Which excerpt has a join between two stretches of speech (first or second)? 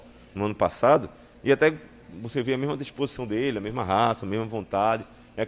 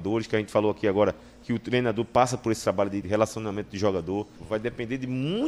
second